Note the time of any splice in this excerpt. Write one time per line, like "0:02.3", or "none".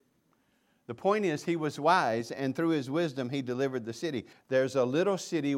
0:04.3